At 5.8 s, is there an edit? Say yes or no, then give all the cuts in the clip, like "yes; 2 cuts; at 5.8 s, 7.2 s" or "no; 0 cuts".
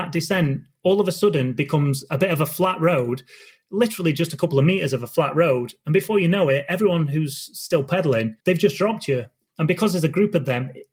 no; 1 cut; at 8.4 s